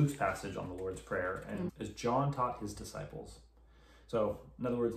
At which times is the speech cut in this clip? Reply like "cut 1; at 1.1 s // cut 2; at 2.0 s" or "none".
cut 1; at 1.7 s